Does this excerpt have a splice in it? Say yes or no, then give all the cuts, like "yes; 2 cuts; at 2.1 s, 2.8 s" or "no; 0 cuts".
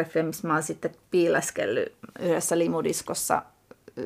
no; 0 cuts